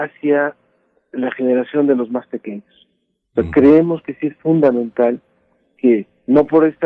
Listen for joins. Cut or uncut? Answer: uncut